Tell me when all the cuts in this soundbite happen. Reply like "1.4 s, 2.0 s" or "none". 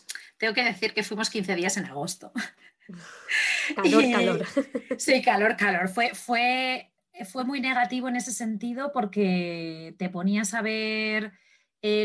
none

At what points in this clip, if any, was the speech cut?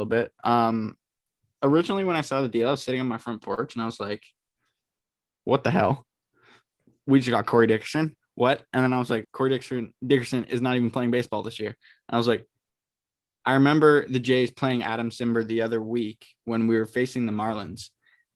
9.2 s

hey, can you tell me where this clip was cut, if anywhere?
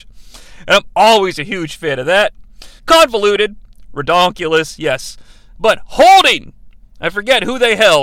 2.8 s

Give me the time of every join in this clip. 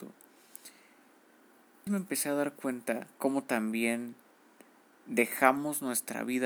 1.9 s, 3.1 s

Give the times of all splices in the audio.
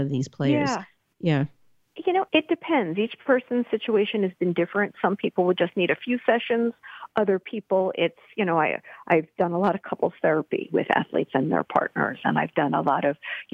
2.3 s

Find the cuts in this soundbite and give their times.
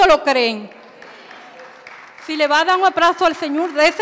none

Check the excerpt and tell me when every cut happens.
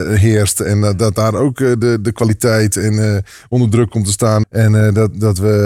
4.4 s

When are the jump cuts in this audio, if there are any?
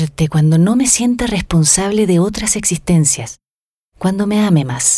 none

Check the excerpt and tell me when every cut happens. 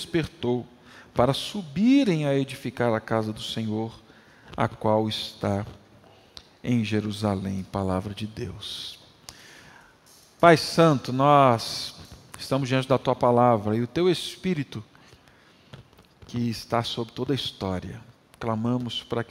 none

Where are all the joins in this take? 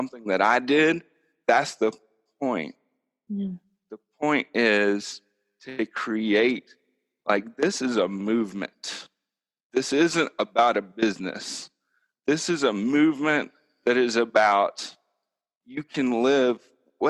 none

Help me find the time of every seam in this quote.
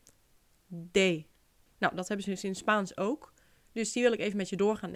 1.7 s

